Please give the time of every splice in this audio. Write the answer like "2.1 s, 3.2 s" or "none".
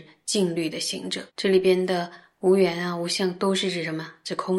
1.3 s